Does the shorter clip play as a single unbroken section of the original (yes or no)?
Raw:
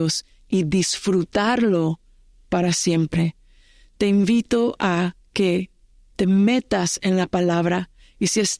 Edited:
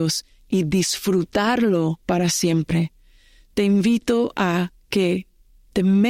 no